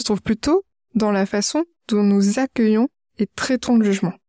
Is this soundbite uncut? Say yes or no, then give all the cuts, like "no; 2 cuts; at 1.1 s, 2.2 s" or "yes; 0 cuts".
yes; 0 cuts